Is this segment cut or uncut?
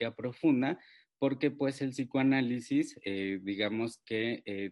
uncut